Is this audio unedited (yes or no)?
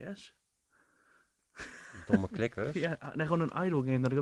yes